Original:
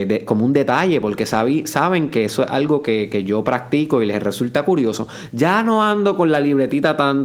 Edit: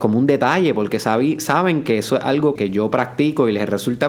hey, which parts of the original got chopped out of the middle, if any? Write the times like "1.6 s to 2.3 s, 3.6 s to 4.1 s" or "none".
2.8 s to 3.1 s